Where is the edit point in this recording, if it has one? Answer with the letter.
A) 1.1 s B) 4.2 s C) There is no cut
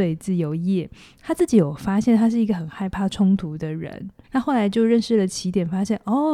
B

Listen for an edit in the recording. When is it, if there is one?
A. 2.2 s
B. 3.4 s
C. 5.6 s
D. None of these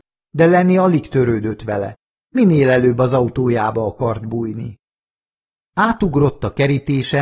D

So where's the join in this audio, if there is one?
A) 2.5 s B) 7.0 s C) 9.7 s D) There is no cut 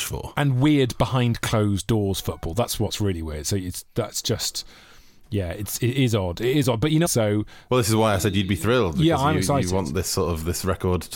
B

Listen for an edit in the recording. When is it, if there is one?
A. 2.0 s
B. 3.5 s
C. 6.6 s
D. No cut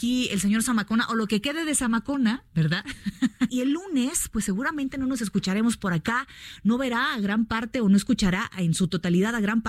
B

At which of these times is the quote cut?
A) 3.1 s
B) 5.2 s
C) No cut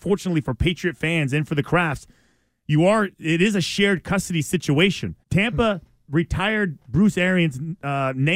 B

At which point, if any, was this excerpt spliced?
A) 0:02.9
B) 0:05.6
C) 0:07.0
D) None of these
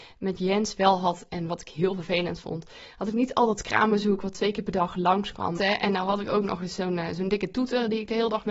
B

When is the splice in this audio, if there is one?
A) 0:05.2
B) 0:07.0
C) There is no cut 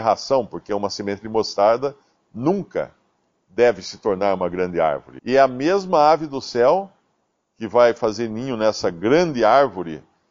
A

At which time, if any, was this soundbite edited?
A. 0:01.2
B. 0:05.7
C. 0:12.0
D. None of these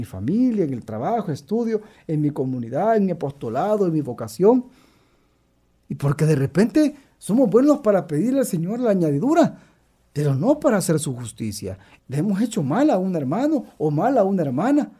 C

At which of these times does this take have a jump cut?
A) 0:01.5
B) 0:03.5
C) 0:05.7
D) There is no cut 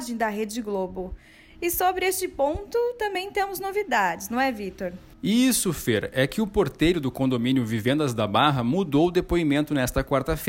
D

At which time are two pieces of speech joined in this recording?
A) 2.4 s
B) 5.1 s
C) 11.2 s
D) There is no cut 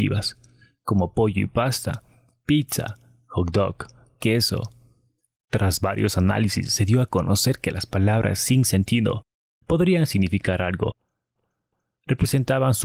D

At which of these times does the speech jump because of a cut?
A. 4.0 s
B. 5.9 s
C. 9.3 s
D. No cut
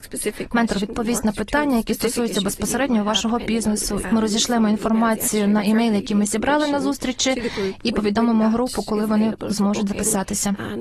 A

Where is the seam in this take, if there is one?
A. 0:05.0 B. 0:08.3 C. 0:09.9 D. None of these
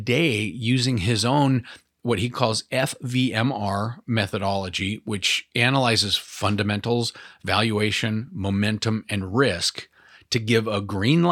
D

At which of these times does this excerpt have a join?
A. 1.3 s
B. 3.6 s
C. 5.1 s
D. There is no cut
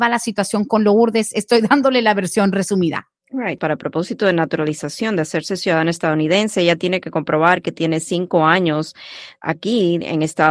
B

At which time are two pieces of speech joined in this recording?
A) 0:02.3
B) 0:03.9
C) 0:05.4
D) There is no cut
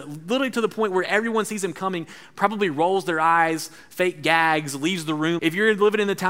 C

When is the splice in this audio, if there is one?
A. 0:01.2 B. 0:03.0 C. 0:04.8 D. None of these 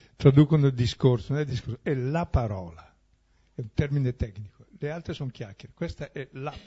D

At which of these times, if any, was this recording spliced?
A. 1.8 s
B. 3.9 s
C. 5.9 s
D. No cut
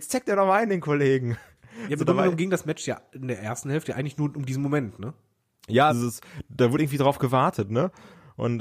C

